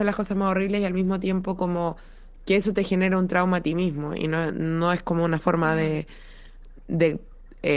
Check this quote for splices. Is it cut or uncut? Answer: uncut